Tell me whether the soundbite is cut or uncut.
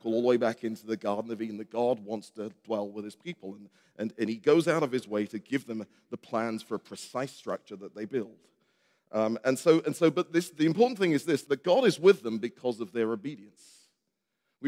cut